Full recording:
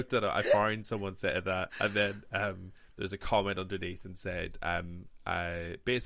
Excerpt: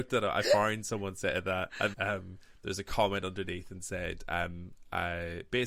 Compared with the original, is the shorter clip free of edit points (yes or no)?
no